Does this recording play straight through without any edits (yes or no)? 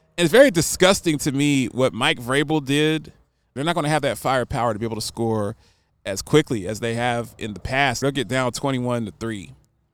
no